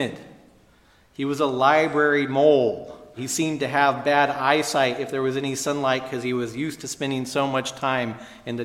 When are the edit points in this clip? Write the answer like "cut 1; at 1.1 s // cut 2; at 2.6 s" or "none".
cut 1; at 3.2 s